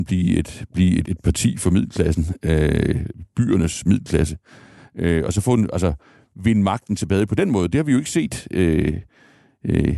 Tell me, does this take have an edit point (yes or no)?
yes